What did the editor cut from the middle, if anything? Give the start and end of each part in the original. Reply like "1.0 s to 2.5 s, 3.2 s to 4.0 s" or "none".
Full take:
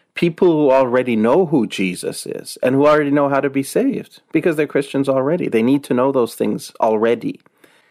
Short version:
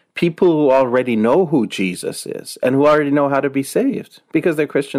none